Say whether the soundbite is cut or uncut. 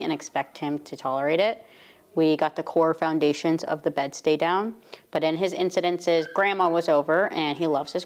uncut